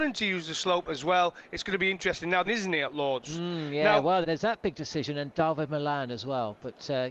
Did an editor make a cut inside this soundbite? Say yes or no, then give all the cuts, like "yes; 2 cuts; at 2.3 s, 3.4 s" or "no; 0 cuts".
yes; 2 cuts; at 2.5 s, 4.2 s